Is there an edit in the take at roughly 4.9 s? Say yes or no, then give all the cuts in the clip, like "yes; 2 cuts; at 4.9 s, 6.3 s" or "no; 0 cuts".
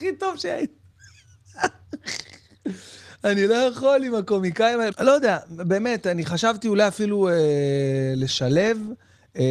yes; 1 cut; at 4.9 s